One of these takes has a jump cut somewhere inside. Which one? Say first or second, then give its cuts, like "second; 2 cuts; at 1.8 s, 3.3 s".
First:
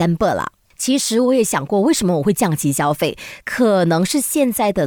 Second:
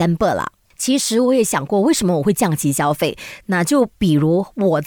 second; 1 cut; at 3.4 s